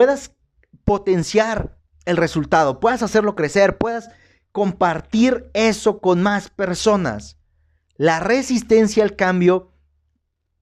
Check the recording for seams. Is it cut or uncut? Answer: uncut